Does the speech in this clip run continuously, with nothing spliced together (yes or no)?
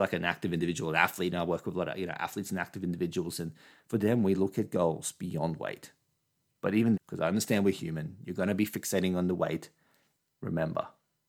no